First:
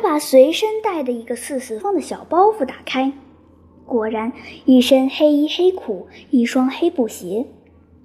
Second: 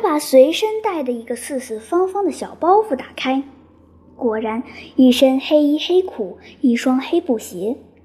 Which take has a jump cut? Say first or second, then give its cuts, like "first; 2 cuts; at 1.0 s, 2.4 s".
first; 1 cut; at 1.8 s